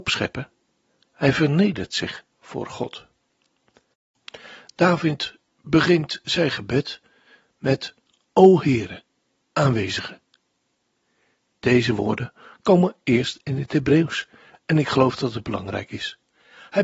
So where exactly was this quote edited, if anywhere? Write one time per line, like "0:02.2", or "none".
0:09.4